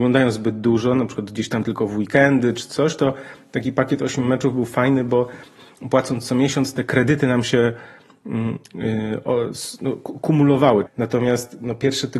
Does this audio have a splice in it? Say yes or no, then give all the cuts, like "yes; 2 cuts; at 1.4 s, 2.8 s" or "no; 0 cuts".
yes; 1 cut; at 10.9 s